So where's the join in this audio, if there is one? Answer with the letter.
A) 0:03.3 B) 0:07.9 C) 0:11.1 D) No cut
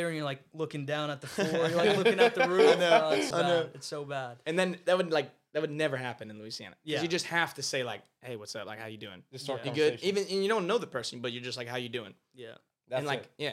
A